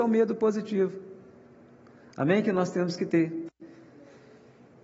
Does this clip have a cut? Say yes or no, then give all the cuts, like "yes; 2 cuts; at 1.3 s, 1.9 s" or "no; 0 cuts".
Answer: no; 0 cuts